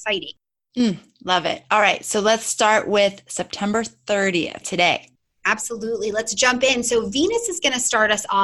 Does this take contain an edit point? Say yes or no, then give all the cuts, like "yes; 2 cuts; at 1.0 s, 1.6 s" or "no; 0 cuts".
yes; 1 cut; at 4.6 s